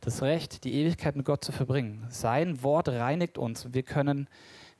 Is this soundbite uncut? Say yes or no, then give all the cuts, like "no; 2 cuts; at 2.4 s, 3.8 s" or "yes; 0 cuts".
yes; 0 cuts